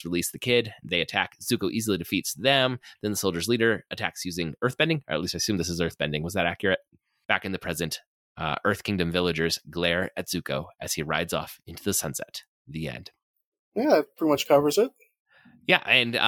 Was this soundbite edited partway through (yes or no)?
yes